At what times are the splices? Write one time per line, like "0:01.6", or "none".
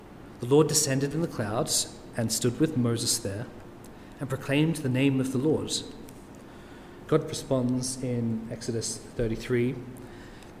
0:07.1